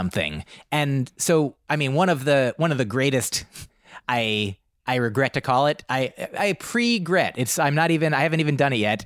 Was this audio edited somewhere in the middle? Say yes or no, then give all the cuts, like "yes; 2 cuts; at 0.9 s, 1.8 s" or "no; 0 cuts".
no; 0 cuts